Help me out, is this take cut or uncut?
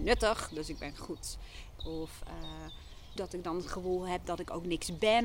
cut